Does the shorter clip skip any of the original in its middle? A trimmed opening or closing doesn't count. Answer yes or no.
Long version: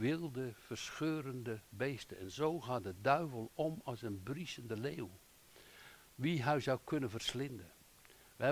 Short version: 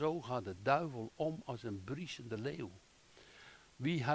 no